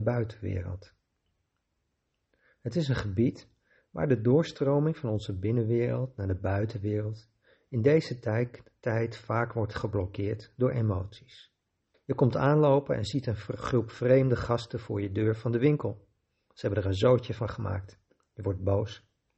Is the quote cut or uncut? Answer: cut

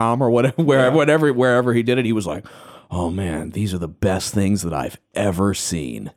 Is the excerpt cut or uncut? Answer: uncut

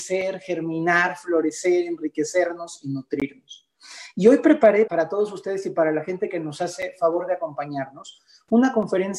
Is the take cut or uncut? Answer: cut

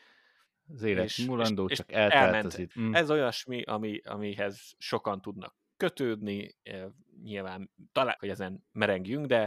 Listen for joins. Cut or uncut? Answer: cut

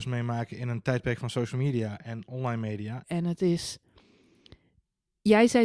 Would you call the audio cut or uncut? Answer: cut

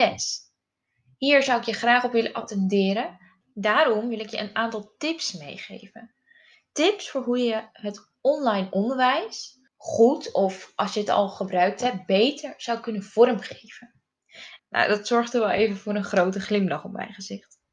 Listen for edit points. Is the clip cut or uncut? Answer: cut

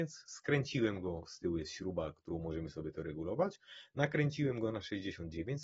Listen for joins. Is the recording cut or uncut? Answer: uncut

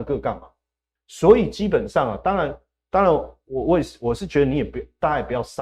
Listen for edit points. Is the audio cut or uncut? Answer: cut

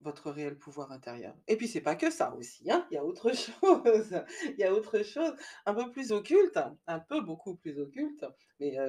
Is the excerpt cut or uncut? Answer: uncut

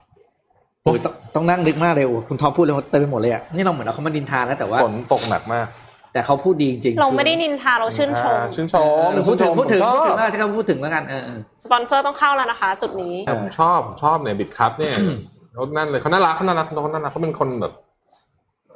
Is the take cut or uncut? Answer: cut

